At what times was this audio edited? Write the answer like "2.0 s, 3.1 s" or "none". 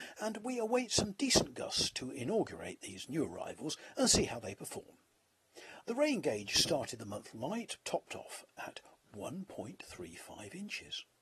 5.8 s, 7.8 s